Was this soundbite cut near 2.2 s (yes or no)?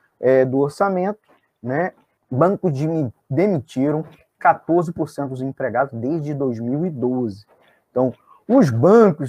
yes